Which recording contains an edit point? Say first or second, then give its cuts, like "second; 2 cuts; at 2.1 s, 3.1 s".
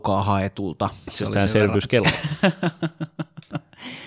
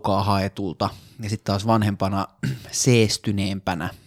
first; 1 cut; at 1.1 s